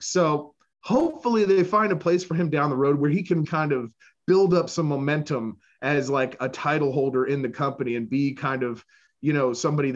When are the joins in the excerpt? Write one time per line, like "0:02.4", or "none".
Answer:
0:03.4

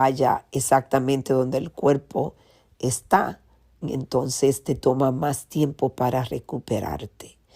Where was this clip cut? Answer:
0:03.8

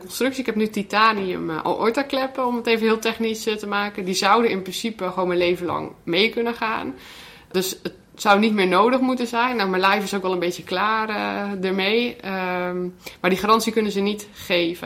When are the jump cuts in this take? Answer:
none

